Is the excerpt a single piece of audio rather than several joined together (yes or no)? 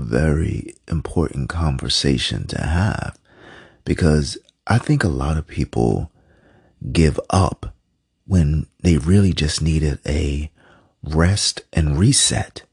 yes